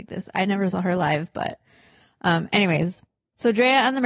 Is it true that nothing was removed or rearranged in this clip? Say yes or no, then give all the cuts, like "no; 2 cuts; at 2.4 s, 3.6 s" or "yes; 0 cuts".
yes; 0 cuts